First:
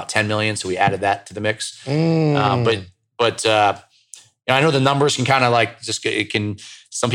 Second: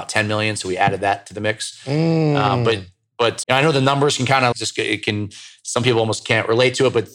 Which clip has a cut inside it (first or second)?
second